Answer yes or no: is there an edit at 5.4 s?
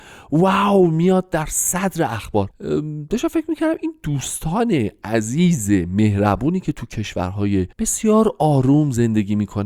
no